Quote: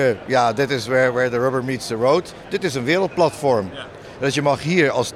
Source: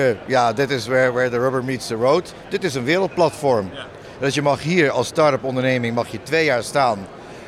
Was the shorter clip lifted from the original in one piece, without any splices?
yes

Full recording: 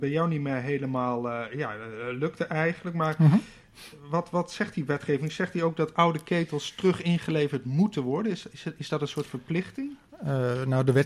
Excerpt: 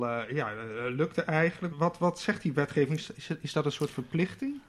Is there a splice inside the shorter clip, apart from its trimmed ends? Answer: yes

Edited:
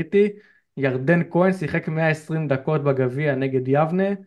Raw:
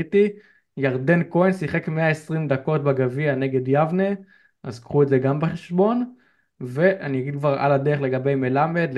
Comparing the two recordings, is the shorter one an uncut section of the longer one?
yes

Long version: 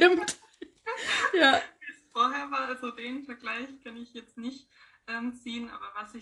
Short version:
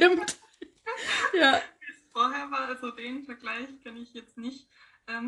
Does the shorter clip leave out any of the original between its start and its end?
no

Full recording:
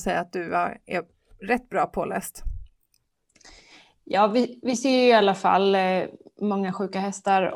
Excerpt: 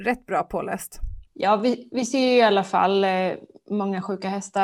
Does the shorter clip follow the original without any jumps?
no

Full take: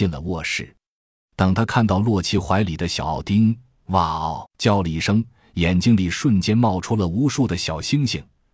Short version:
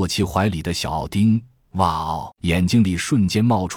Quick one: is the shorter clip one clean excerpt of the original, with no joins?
no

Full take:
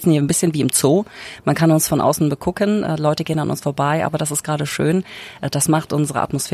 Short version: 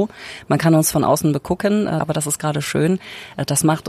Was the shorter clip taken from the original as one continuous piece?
no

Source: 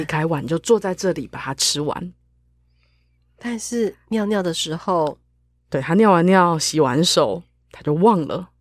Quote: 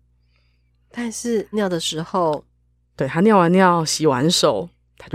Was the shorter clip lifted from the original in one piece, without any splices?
no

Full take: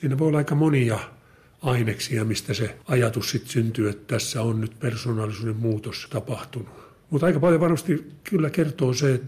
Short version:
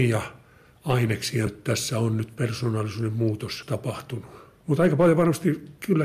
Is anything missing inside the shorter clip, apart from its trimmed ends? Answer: yes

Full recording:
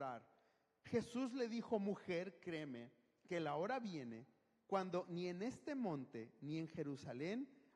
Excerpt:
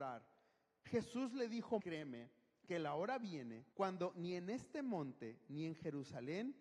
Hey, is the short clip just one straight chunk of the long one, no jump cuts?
no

